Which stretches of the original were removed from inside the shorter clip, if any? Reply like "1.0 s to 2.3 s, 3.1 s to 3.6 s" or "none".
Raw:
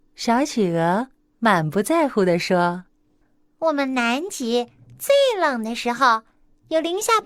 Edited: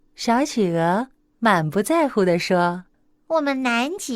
2.9 s to 3.3 s